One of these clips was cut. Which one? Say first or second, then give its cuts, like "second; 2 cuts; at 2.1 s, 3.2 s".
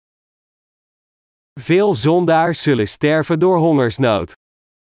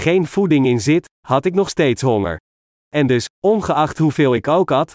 second; 1 cut; at 2.8 s